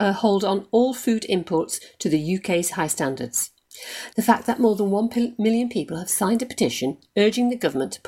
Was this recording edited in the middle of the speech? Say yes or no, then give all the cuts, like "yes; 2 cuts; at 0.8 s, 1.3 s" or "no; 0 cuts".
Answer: yes; 1 cut; at 4.1 s